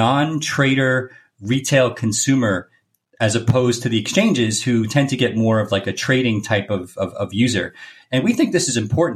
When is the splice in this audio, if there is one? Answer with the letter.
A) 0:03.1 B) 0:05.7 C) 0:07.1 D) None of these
D